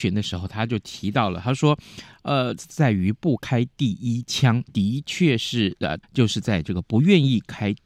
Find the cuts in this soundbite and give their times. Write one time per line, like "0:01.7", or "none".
0:02.6
0:04.7
0:06.0